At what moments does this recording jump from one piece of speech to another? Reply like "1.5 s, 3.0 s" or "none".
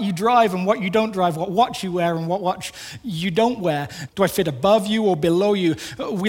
4.1 s